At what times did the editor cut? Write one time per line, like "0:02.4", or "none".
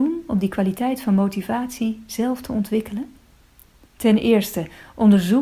none